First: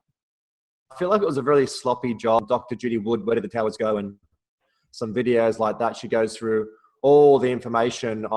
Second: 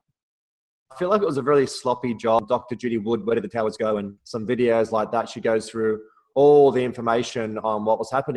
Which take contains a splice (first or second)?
second